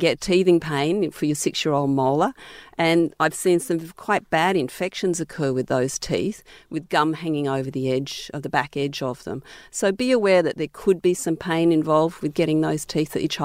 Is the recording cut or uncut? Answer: uncut